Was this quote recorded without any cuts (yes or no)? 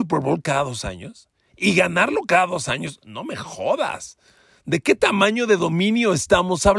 yes